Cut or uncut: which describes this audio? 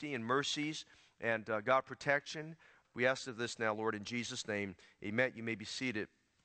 cut